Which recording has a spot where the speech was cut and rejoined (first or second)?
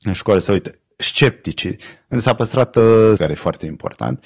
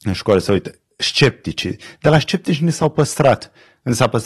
first